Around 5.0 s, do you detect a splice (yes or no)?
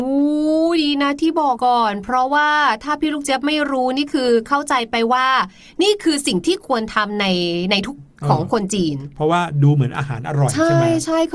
no